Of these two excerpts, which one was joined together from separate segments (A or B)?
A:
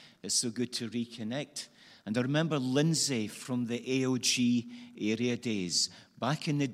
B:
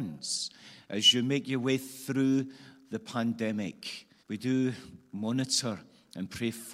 B